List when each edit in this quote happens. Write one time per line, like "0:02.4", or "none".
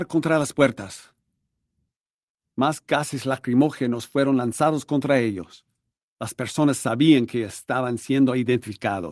0:06.0